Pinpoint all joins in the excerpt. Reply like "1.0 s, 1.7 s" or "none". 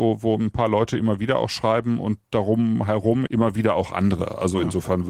3.3 s

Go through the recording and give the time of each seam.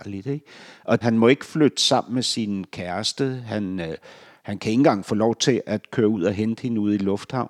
1.0 s

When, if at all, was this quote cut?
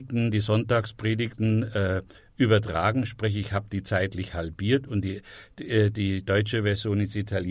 none

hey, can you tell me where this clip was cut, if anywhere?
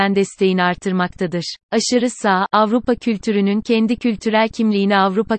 1.6 s

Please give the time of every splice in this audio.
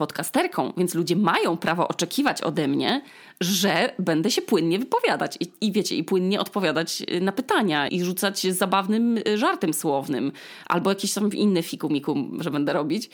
7.9 s

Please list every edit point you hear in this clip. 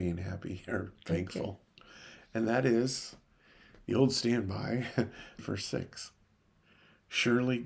5.4 s

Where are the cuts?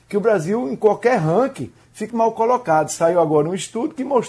2.1 s

